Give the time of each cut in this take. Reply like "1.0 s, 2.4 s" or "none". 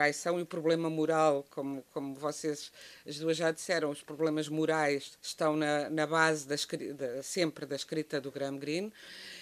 5.2 s, 8.2 s